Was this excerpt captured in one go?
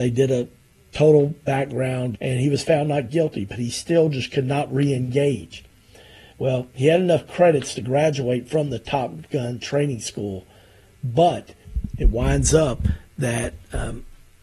no; 1 cut; at 2.1 s

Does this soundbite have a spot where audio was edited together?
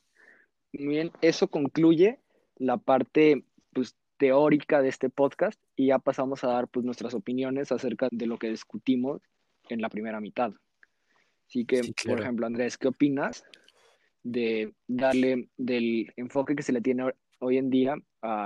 yes; 1 cut; at 8.1 s

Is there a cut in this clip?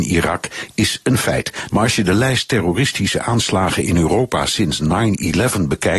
yes; 1 cut; at 1.7 s

